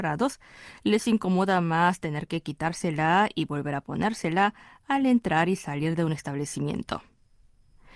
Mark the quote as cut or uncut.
uncut